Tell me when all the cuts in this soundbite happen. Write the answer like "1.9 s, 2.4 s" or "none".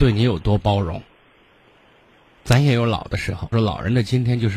2.4 s, 3.5 s